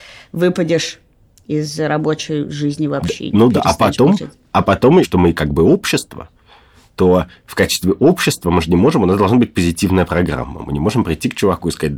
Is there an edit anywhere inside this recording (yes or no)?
yes